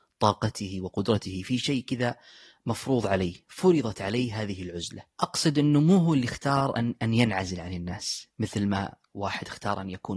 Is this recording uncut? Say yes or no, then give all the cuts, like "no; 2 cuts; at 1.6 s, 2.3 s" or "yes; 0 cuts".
yes; 0 cuts